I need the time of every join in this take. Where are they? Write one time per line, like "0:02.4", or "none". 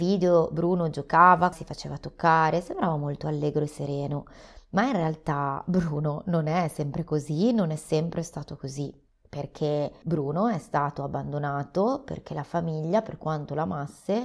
0:01.5

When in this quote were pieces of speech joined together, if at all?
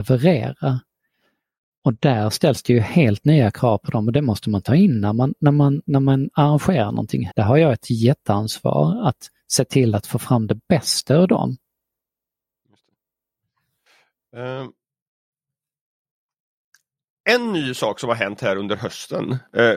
0:07.3

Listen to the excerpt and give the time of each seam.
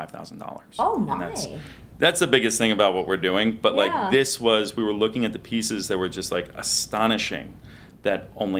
none

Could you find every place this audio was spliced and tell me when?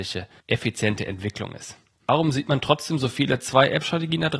0:02.0

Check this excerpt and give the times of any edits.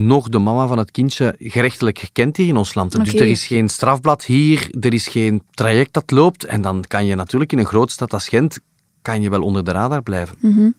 none

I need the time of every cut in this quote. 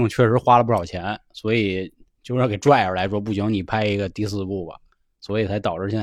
none

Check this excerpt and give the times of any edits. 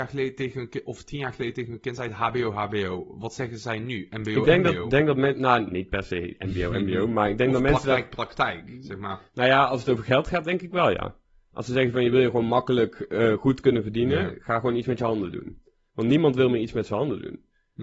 none

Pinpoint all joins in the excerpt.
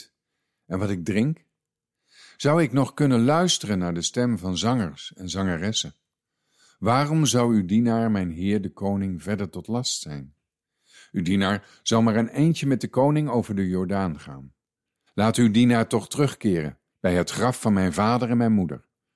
0:15.1
0:16.9

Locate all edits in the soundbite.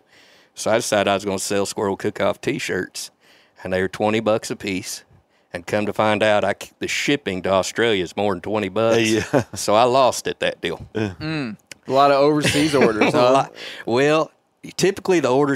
none

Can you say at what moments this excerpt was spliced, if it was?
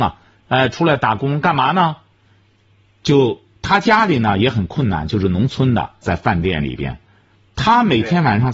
0:06.0

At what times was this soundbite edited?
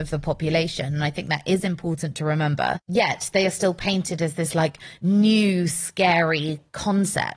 none

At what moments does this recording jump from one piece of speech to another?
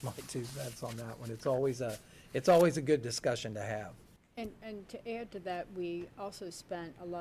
0:04.2

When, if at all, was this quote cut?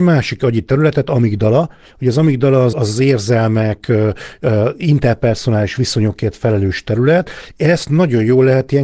0:02.7

